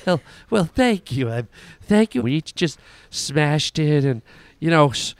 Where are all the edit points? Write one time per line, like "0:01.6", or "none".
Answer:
0:02.2